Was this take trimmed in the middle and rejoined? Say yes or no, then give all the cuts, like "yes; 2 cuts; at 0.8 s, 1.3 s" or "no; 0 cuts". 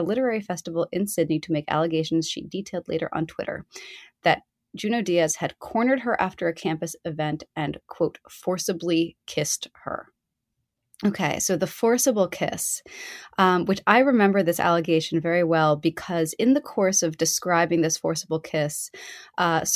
no; 0 cuts